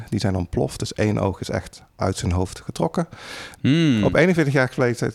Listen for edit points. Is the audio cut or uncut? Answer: cut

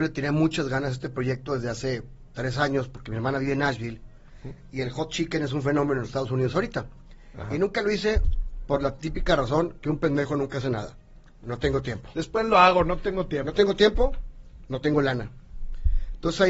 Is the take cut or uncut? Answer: uncut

